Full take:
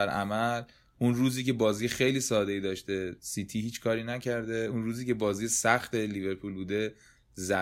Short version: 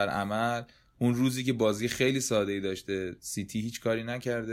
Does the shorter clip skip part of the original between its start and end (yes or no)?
no